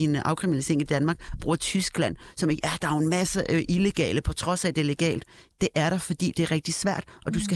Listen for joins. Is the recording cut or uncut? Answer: cut